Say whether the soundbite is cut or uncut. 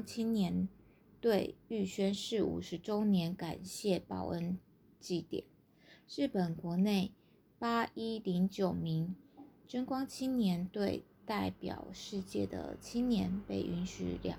uncut